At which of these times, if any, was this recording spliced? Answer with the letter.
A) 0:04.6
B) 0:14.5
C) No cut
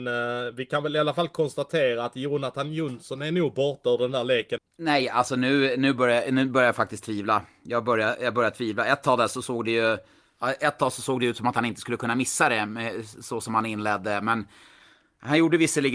A